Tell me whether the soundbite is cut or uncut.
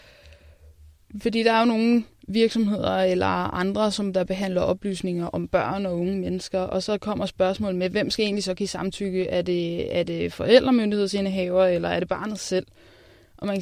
uncut